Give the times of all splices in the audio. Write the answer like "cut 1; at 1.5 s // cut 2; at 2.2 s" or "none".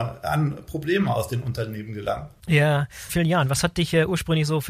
cut 1; at 3.1 s